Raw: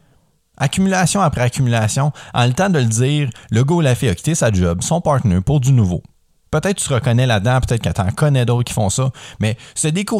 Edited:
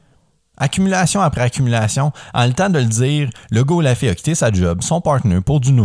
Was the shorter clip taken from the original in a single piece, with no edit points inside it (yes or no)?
yes